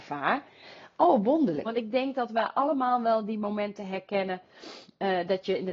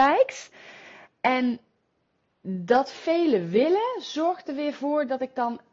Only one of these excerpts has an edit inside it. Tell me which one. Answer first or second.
first